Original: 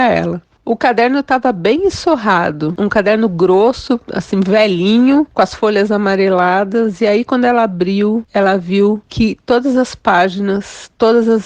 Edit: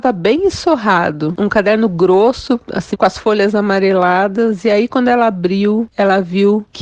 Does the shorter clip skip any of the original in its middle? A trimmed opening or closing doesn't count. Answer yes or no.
yes